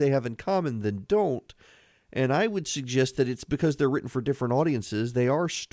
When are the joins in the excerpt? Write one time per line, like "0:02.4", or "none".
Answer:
none

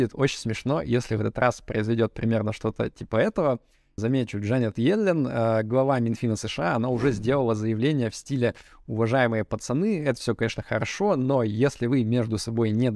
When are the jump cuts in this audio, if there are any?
0:04.0

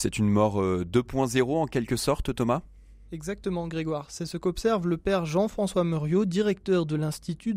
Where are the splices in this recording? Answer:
none

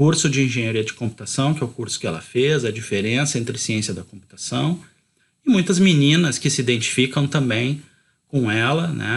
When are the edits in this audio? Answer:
none

